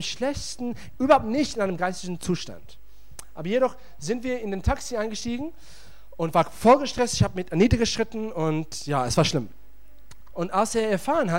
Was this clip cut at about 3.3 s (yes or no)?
no